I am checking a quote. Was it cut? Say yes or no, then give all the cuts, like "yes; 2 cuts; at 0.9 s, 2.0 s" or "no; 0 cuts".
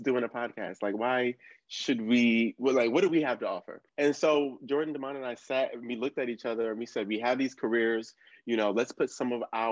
yes; 1 cut; at 3.9 s